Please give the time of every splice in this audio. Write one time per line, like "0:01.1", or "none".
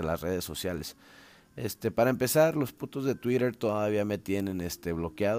none